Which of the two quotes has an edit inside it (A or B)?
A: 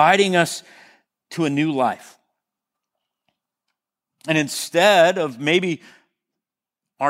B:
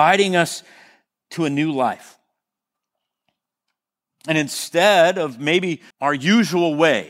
B